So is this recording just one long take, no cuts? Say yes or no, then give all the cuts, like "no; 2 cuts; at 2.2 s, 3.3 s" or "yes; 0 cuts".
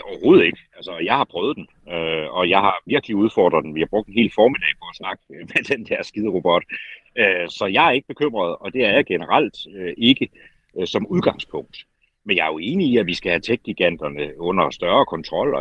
no; 1 cut; at 7.5 s